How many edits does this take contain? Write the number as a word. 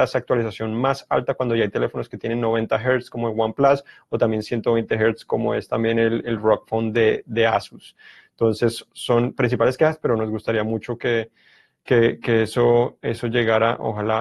zero